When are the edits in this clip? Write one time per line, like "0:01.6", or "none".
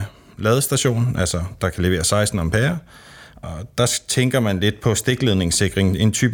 none